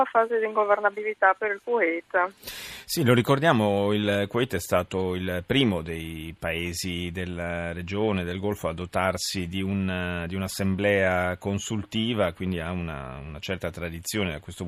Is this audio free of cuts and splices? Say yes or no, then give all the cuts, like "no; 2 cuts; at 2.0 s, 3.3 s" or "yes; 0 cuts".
yes; 0 cuts